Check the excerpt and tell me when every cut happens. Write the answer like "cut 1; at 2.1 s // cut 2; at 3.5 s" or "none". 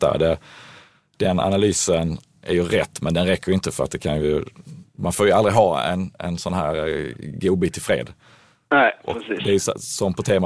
none